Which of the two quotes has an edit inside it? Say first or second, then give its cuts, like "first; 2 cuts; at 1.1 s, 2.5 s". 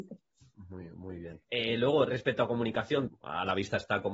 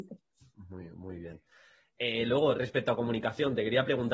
first; 2 cuts; at 1.4 s, 3.1 s